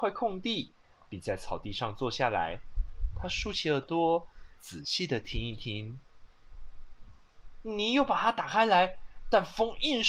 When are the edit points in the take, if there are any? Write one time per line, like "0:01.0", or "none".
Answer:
0:07.6